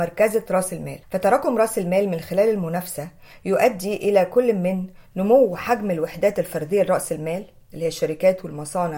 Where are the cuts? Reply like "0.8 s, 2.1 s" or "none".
1.0 s